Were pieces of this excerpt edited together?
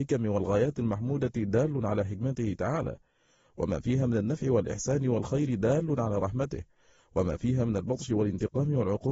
no; 0 cuts

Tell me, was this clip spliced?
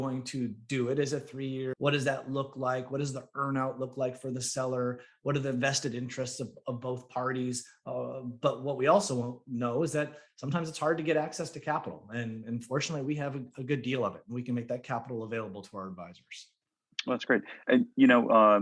yes; 1 cut; at 1.7 s

